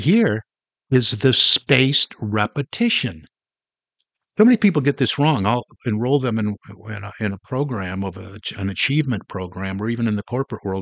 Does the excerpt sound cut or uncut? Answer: uncut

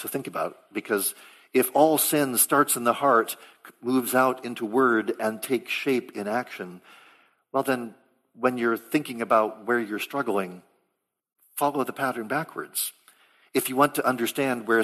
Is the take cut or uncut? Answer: uncut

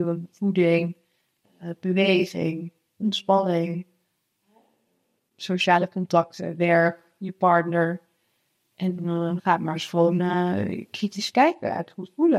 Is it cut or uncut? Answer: cut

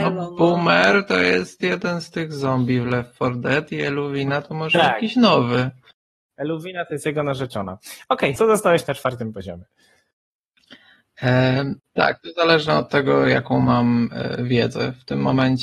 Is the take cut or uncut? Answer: cut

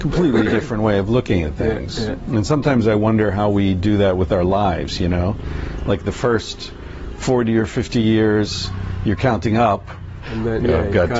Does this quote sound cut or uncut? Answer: cut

